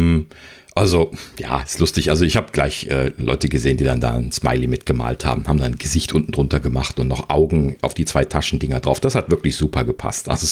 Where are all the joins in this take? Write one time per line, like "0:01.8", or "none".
0:07.8